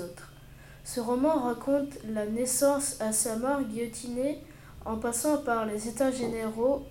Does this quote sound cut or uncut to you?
uncut